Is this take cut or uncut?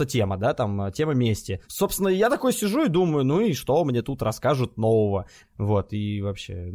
cut